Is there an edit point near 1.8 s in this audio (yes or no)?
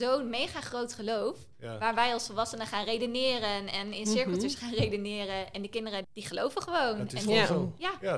no